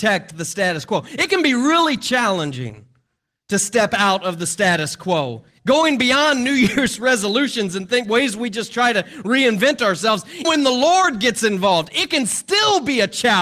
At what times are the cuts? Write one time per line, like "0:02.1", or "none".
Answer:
0:05.6
0:10.4